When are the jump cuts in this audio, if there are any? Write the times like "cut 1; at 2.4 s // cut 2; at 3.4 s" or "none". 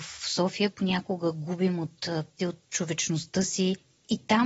cut 1; at 2.4 s